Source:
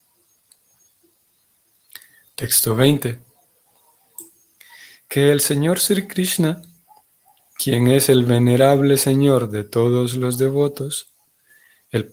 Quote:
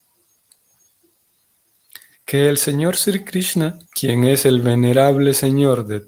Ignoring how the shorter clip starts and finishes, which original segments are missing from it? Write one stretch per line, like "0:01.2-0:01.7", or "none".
0:02.1-0:04.9
0:06.7-0:07.5